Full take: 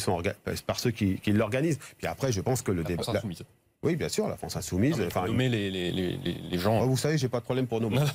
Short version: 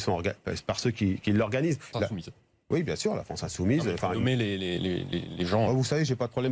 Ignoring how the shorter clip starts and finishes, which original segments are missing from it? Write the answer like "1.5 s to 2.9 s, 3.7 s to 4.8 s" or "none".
1.9 s to 3.1 s